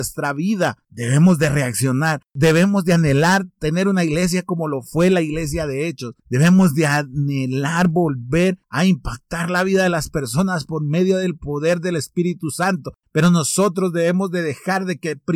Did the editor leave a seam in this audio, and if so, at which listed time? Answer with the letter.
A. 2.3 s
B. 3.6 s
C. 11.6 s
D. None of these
D